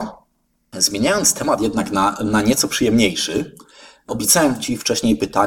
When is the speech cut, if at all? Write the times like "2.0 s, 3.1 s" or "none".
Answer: none